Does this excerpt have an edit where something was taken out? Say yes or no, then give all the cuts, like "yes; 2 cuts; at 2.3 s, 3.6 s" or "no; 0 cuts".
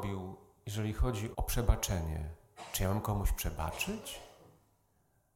yes; 1 cut; at 1.3 s